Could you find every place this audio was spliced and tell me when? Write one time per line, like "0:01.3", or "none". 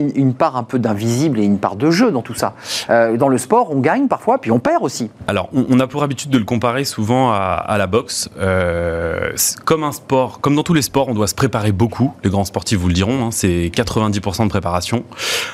none